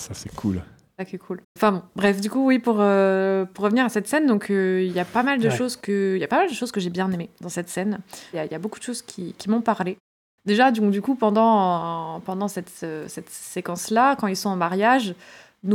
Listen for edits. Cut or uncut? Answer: cut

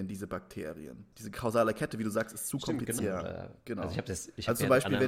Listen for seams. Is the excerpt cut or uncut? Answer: cut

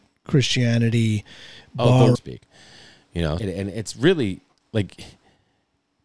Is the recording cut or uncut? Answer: cut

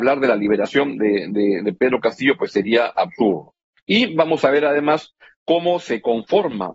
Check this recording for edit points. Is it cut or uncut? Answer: uncut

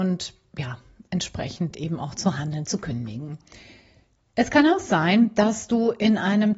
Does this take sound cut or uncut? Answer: uncut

